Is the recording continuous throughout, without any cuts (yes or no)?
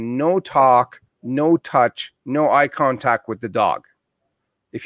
yes